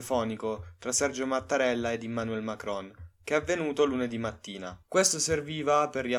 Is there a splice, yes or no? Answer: no